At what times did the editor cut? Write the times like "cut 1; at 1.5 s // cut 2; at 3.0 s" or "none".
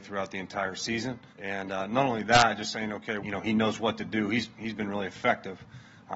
cut 1; at 1.3 s // cut 2; at 3.2 s

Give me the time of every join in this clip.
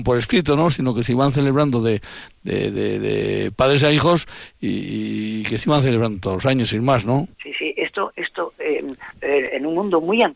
cut 1; at 7.3 s // cut 2; at 9.1 s

